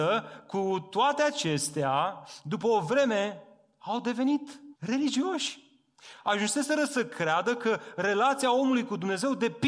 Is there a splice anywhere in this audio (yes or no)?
yes